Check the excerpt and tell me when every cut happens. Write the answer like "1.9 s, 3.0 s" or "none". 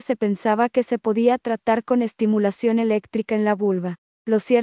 none